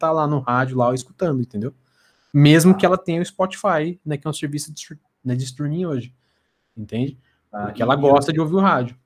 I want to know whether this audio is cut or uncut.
uncut